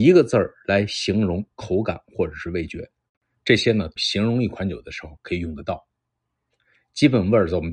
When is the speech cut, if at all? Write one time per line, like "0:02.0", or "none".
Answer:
0:04.0